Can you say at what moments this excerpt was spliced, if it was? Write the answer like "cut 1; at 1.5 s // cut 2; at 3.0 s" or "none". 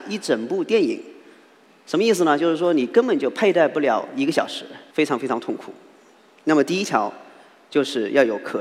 cut 1; at 4.9 s